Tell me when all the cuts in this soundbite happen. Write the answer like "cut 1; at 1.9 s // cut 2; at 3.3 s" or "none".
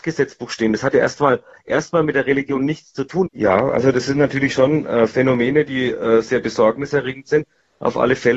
cut 1; at 3.3 s